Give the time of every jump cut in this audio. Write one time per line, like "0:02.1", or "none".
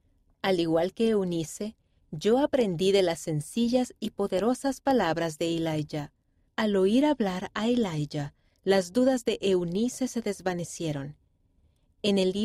0:06.5